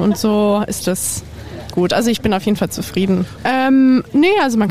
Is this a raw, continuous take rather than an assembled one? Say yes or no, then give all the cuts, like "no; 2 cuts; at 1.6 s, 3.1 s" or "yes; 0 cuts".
no; 2 cuts; at 1.7 s, 3.4 s